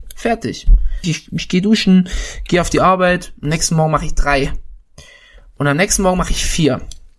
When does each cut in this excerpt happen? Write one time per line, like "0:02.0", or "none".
0:01.0

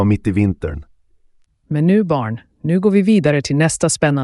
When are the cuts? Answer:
0:01.5

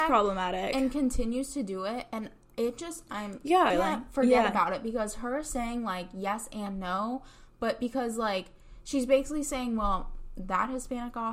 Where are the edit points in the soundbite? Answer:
0:03.7

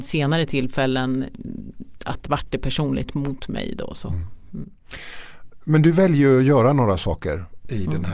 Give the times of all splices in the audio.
none

